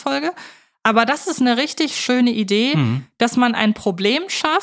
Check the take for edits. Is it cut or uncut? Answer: uncut